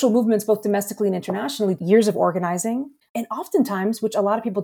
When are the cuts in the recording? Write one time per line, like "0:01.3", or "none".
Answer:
0:01.8
0:03.0